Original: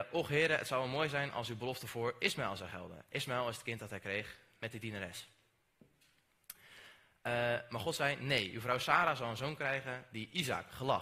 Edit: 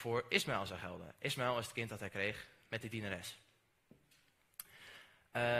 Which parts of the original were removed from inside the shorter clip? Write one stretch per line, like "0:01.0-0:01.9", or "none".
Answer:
none